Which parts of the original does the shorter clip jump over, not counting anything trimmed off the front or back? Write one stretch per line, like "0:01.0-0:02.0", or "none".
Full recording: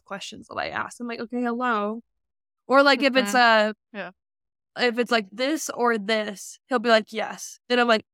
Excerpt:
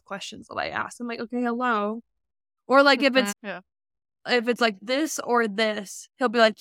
0:03.3-0:03.8